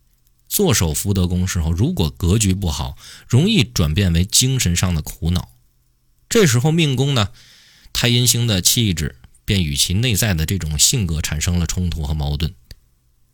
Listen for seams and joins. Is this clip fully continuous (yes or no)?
yes